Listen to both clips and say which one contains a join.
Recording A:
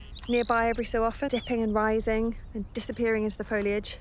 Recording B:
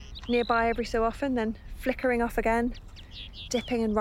A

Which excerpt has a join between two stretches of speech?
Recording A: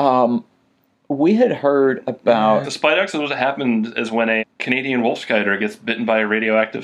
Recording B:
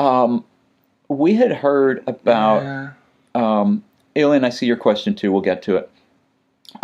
A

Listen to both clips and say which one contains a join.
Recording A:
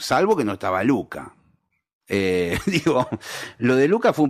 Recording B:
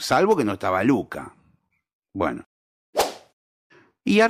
A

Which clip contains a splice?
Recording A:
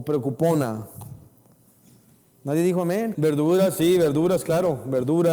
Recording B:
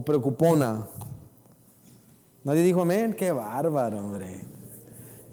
A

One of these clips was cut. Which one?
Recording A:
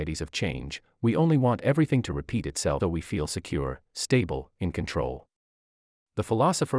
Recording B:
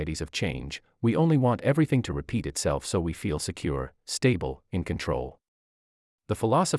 A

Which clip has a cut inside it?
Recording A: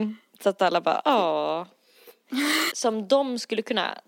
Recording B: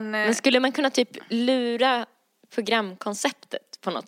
A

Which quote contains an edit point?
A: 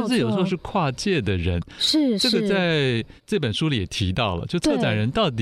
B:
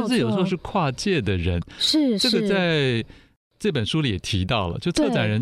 A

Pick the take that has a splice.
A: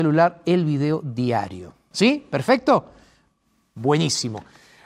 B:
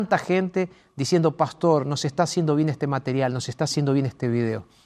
A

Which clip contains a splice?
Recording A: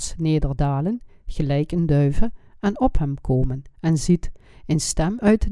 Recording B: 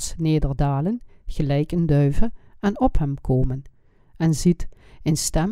A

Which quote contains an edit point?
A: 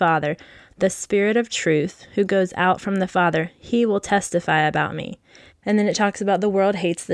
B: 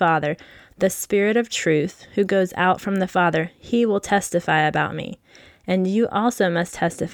A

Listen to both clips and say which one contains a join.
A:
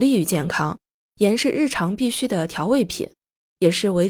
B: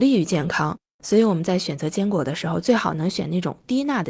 B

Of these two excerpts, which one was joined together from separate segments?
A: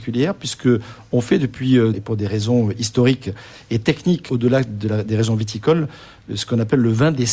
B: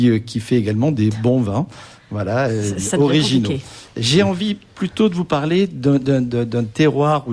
A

